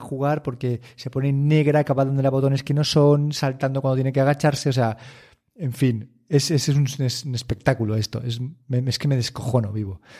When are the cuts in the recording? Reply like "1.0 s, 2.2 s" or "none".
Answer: none